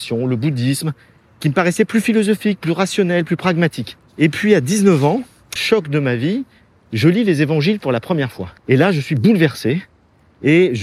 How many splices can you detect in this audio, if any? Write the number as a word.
three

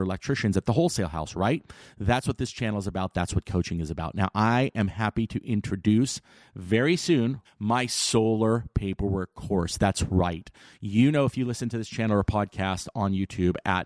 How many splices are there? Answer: one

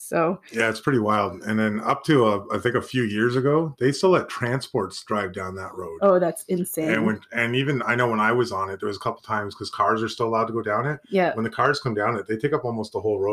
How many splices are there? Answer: zero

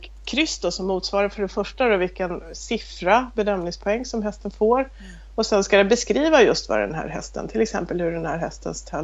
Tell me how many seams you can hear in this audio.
zero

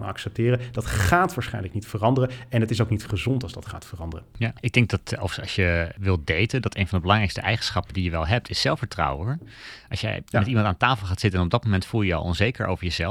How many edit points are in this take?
one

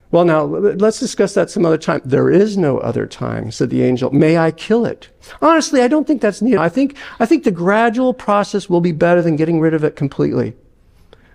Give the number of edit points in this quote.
one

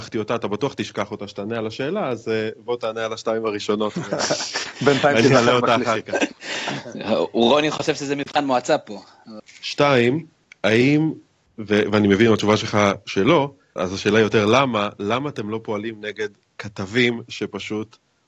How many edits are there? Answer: two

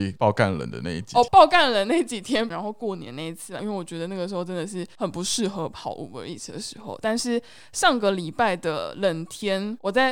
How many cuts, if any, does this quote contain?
three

